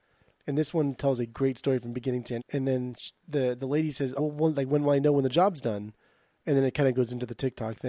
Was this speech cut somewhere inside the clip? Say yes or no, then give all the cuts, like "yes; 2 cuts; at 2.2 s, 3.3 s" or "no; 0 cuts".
yes; 2 cuts; at 2.4 s, 4.2 s